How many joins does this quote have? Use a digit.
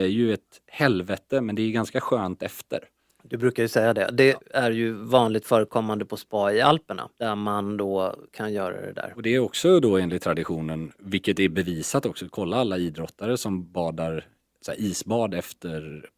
1